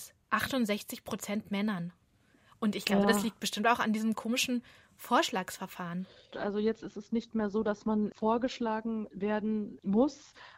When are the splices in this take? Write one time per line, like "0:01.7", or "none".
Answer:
0:06.3